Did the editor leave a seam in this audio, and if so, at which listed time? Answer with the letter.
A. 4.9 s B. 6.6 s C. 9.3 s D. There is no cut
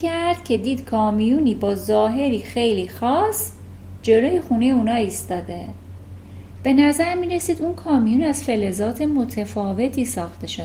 D